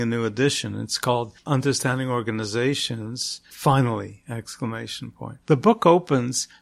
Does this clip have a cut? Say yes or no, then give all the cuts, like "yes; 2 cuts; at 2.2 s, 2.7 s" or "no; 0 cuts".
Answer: no; 0 cuts